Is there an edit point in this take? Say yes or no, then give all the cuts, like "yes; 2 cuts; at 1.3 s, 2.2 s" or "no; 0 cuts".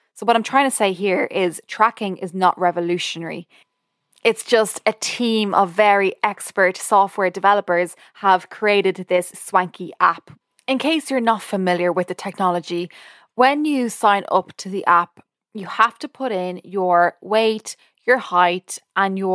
yes; 1 cut; at 9.3 s